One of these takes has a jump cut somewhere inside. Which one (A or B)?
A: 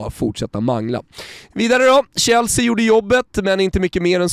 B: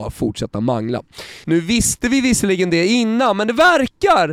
B